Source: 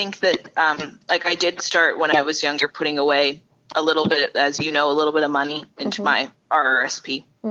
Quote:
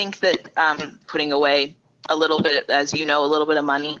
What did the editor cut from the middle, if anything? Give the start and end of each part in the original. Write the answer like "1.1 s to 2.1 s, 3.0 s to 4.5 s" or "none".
1.0 s to 2.7 s